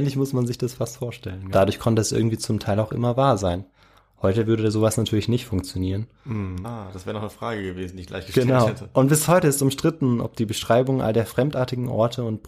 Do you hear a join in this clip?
yes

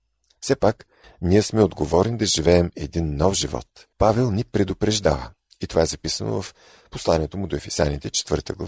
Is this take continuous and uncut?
no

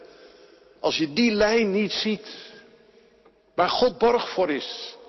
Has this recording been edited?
no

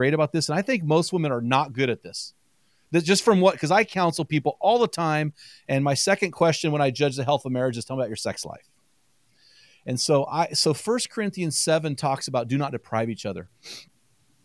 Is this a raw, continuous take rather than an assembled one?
yes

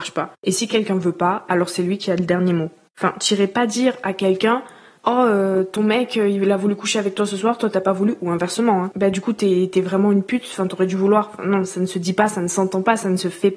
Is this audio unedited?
yes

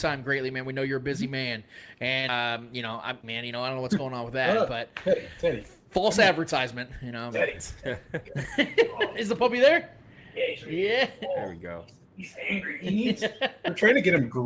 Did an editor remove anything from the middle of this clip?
yes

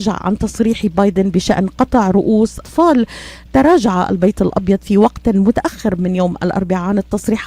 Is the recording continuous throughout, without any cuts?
no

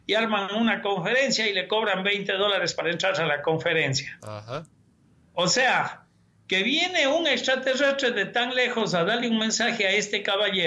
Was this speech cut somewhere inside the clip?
no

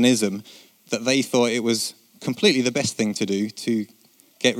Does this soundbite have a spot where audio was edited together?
no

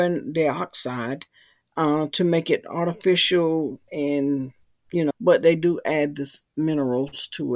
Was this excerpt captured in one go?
no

